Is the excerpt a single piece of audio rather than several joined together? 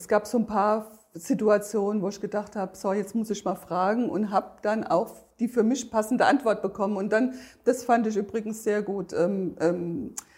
yes; 0 cuts

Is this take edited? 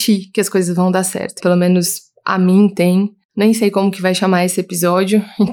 yes; 1 cut; at 1.4 s

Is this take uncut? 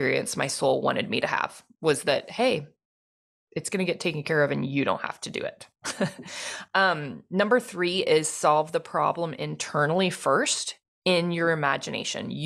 yes; 0 cuts

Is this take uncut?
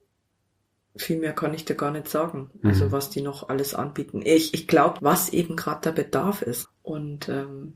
no; 2 cuts; at 5.0 s, 6.6 s

